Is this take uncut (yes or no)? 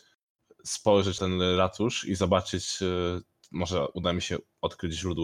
no